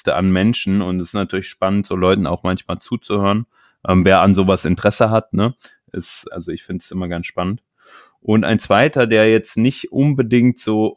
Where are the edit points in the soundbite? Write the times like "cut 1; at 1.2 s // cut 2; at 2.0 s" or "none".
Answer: cut 1; at 6.3 s